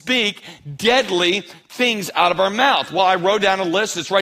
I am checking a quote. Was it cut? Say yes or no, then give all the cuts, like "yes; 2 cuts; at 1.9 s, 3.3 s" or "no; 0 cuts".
no; 0 cuts